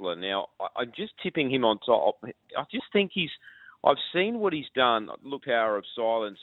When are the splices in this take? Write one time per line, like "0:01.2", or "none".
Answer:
0:05.4